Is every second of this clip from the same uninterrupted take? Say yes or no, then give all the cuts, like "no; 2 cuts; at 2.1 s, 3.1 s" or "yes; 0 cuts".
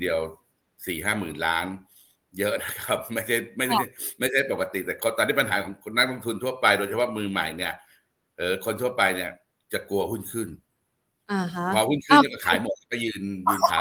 yes; 0 cuts